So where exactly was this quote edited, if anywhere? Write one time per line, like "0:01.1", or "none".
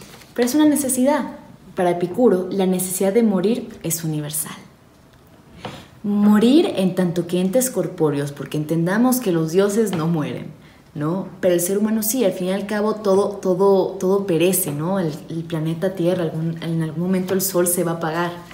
0:01.7